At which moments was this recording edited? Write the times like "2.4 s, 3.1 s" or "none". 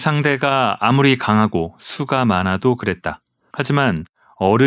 3.5 s